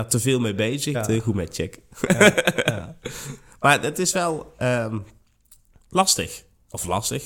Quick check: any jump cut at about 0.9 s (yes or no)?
yes